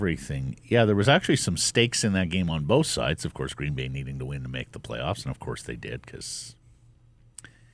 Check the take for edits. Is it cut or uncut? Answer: uncut